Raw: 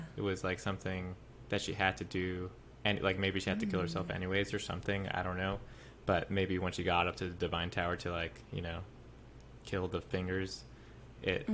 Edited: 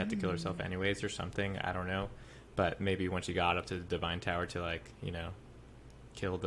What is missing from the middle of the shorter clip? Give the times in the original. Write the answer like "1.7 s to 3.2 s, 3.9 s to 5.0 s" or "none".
none

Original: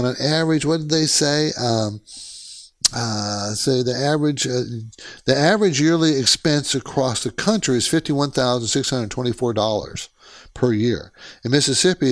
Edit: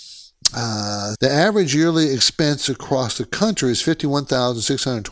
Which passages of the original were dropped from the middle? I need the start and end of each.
3.5 s to 5.2 s

